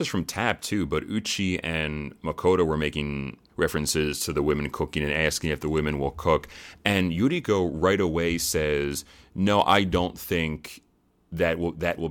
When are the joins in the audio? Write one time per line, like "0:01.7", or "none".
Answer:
none